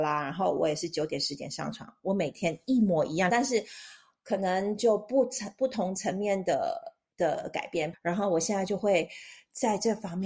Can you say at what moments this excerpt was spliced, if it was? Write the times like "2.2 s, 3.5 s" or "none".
3.3 s, 7.9 s